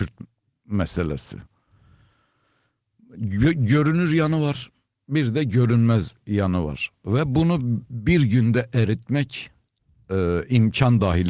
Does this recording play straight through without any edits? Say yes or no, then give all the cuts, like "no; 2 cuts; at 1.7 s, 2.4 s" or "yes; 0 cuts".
yes; 0 cuts